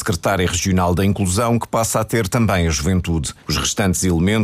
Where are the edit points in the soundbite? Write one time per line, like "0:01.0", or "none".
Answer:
0:03.4

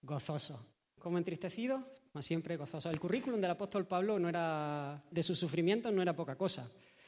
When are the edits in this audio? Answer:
0:05.1

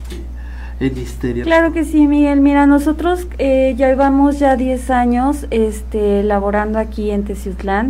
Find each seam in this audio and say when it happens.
0:01.4

